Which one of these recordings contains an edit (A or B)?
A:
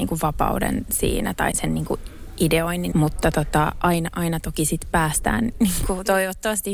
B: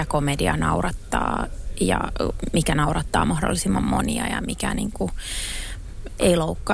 A